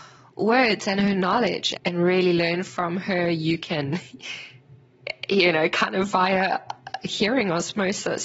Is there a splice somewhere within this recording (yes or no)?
yes